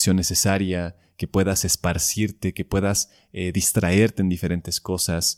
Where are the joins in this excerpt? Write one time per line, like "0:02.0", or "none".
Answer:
none